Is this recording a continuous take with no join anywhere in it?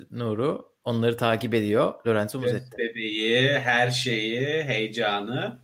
yes; 0 cuts

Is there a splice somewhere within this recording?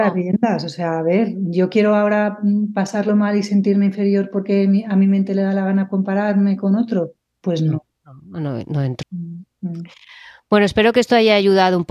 yes; 2 cuts; at 7.9 s, 9.0 s

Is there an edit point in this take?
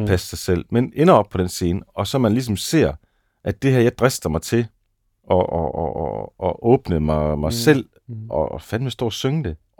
no; 0 cuts

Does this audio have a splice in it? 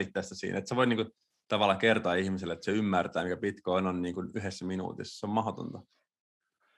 no; 0 cuts

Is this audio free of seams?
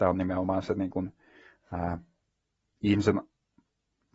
yes; 0 cuts

